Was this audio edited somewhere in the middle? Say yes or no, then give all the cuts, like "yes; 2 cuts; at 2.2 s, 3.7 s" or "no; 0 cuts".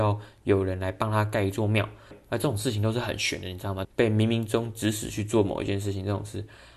yes; 2 cuts; at 2.1 s, 3.8 s